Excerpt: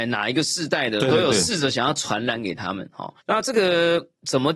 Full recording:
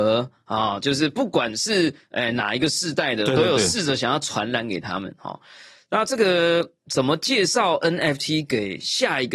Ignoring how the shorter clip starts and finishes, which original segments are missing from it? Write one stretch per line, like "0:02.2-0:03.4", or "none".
0:05.5-0:05.8